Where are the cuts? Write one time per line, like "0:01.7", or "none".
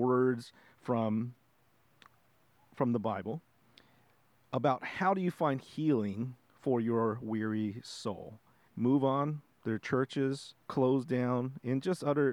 0:08.7
0:10.6